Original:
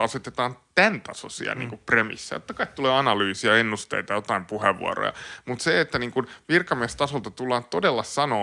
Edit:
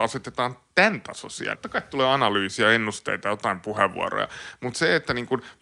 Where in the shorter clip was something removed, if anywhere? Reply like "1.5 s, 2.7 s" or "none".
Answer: 1.5 s

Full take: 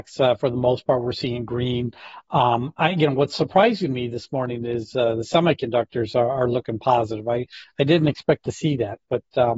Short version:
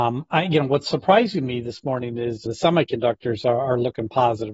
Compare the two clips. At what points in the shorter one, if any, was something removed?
2.5 s

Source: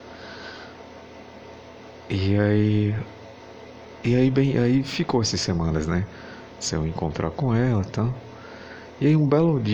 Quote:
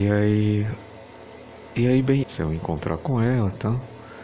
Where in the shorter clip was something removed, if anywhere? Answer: 2.2 s

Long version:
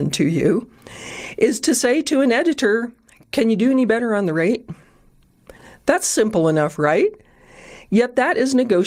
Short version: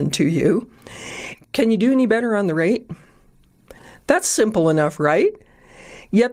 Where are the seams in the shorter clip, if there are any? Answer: 1.3 s

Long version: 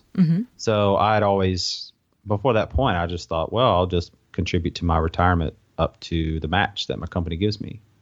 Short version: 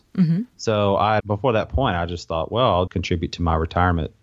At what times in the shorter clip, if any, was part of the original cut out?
1.2 s, 2.9 s

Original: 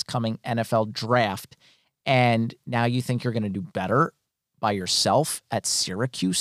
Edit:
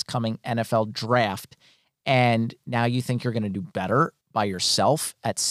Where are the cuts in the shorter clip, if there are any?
4.2 s

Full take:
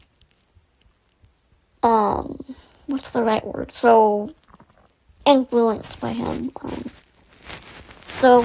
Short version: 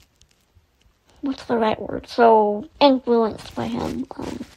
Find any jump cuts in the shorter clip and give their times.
1.1 s, 2.7 s

